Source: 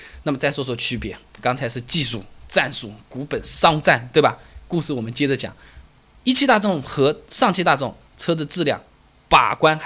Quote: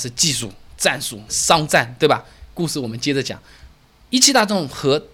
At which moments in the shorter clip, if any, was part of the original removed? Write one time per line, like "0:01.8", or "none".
0:01.3